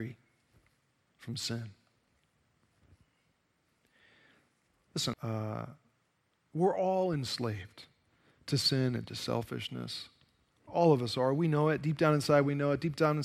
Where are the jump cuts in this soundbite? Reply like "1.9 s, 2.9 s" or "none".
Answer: 5.1 s